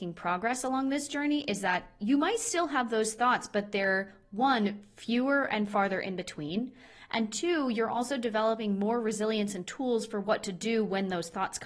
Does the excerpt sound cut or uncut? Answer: uncut